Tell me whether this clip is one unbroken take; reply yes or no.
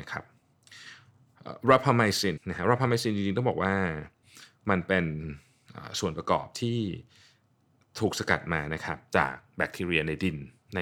no